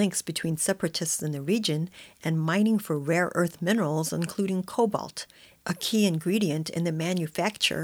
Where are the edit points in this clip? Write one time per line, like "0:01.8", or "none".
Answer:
none